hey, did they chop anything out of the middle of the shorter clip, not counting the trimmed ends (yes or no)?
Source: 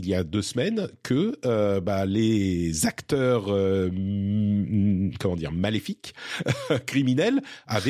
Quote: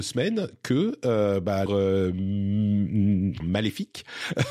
yes